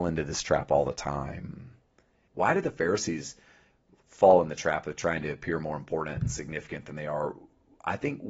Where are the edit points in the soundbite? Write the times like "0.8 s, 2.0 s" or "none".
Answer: 2.3 s

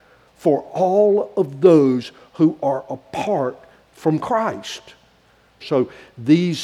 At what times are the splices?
5.6 s

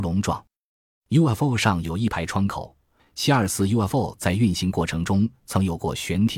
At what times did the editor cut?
3.0 s

